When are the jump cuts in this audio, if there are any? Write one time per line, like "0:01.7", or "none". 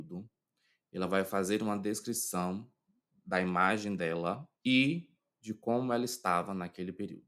0:04.5